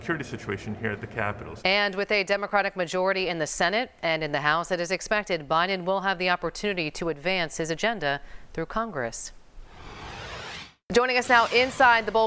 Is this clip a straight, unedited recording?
no; 1 cut; at 1.6 s

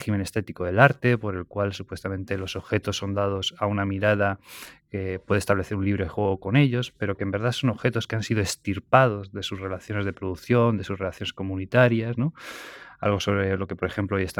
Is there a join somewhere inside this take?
no; 0 cuts

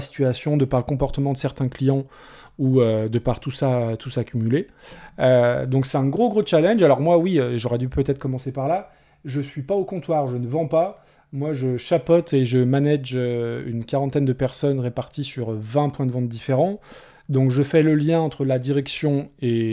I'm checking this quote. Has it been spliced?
no; 0 cuts

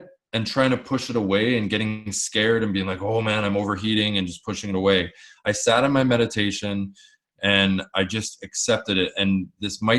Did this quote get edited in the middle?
no; 0 cuts

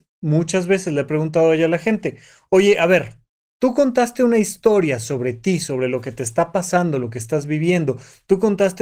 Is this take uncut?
yes; 0 cuts

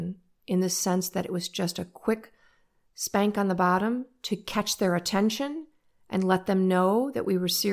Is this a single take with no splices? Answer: yes; 0 cuts

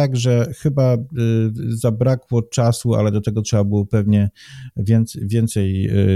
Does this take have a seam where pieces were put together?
no; 0 cuts

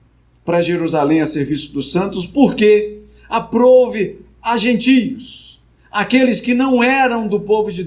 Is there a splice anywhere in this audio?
no; 0 cuts

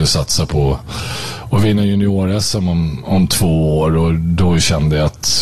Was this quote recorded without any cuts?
yes; 0 cuts

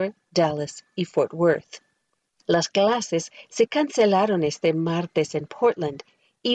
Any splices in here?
yes; 1 cut; at 2.4 s

